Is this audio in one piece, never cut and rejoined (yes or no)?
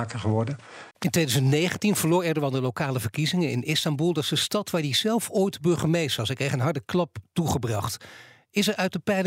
no